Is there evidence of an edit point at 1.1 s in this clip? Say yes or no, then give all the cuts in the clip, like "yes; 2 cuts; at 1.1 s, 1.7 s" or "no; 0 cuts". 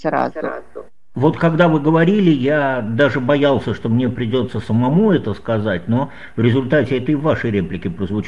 no; 0 cuts